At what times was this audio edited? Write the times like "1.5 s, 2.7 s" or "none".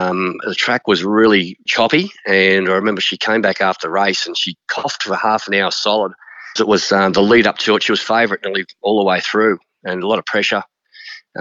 1.7 s, 6.6 s